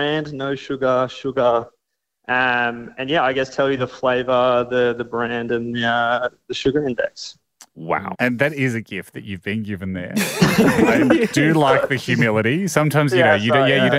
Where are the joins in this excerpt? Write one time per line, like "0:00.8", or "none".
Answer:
0:08.1